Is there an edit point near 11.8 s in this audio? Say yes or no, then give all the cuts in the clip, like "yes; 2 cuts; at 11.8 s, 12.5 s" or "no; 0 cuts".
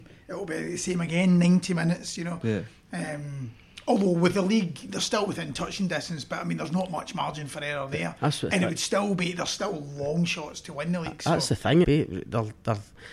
yes; 2 cuts; at 2.2 s, 11.8 s